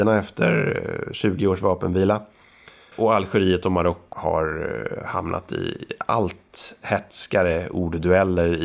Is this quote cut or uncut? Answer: cut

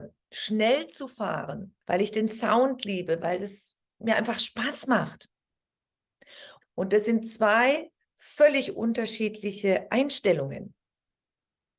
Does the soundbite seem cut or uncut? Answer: cut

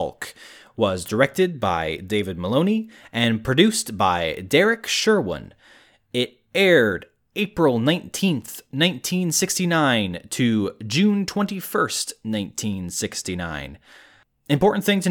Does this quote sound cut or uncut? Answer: uncut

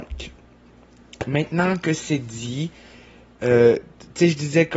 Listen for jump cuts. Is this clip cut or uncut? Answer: uncut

